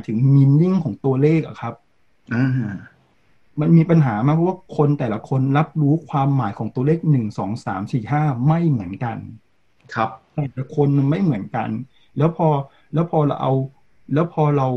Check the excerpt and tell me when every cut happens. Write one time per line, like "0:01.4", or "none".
none